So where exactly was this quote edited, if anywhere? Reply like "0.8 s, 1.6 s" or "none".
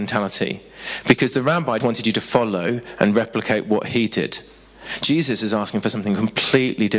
1.8 s